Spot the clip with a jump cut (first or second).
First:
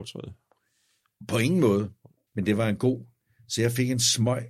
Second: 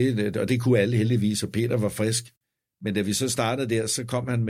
first